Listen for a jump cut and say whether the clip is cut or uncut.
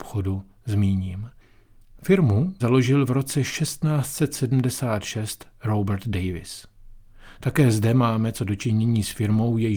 cut